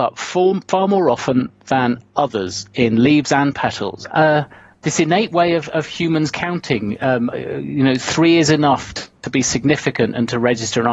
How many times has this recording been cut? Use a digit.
2